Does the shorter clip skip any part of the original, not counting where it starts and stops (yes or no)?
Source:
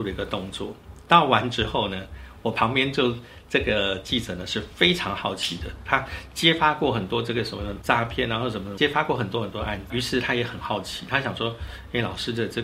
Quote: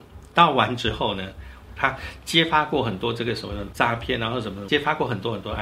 yes